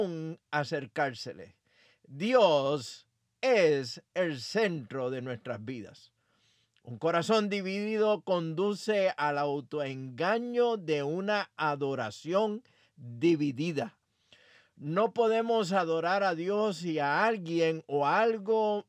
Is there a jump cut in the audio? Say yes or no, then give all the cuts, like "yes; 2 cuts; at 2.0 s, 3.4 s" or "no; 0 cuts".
no; 0 cuts